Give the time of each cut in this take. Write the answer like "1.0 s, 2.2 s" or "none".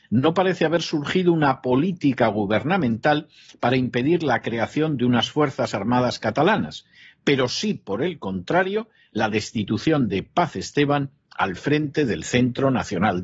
none